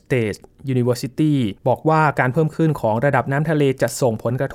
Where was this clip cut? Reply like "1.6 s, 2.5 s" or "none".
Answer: 1.6 s